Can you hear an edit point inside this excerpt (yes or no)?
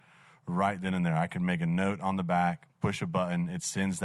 no